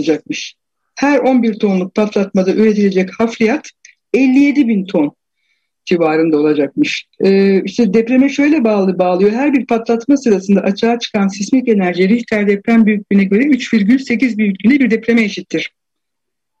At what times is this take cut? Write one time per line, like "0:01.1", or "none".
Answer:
0:07.1